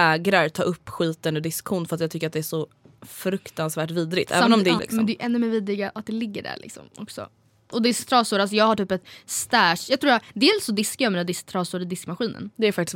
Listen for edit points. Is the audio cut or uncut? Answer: cut